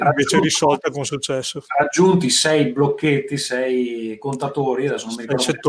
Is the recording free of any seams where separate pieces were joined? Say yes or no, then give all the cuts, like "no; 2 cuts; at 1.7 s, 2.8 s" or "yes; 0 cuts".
yes; 0 cuts